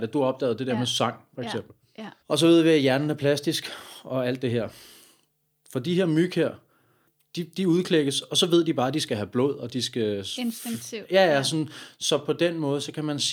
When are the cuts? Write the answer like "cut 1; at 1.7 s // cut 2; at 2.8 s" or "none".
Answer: cut 1; at 2.2 s